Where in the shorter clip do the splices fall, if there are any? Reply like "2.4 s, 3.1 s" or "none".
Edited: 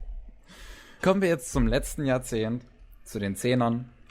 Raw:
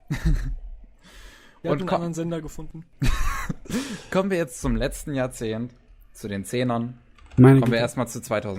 1.0 s